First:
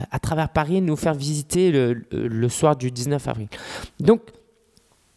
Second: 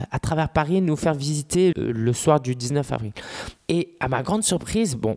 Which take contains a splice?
second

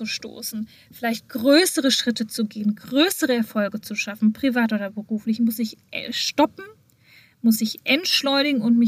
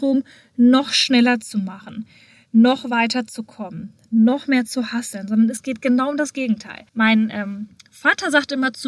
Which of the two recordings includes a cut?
second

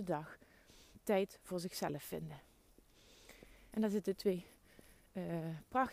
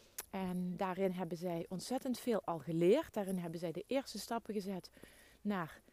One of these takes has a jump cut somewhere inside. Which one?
first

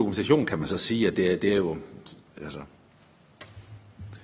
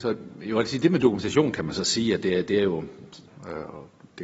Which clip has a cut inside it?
second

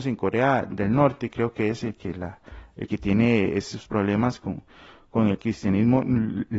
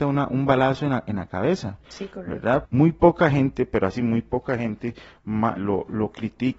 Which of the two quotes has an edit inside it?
second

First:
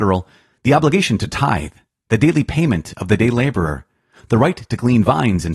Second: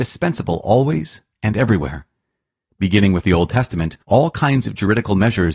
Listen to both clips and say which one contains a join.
second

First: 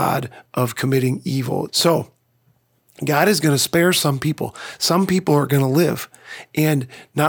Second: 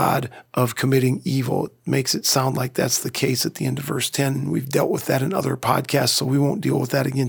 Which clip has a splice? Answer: first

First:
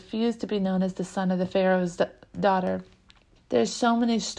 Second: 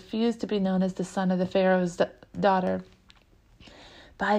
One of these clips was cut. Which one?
first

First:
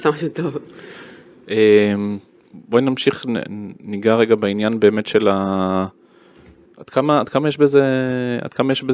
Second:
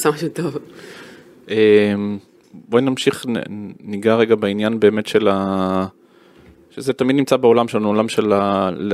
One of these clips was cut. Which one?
first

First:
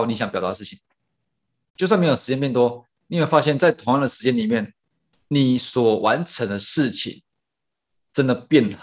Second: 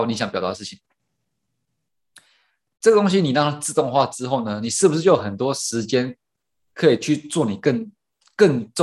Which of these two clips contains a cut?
first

